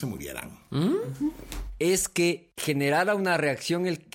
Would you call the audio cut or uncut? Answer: cut